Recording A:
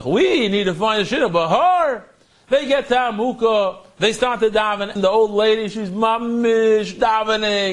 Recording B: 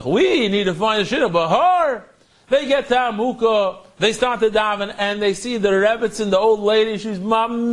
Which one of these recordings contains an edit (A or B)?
A